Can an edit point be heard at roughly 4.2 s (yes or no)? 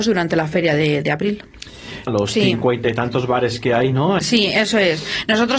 yes